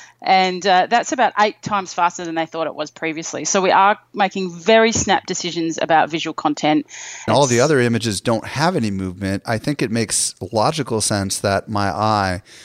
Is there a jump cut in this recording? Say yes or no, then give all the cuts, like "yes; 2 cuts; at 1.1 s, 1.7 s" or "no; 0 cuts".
yes; 1 cut; at 7.3 s